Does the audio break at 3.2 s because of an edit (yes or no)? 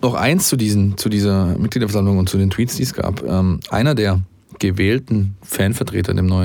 no